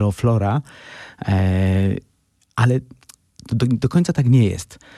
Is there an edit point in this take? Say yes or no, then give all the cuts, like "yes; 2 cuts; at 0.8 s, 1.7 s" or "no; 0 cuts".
no; 0 cuts